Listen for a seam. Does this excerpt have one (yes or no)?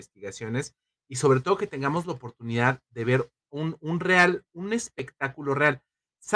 no